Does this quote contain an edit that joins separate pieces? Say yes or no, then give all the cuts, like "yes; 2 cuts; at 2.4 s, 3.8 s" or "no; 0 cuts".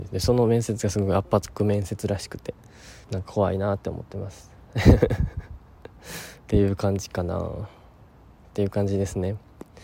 yes; 1 cut; at 3.0 s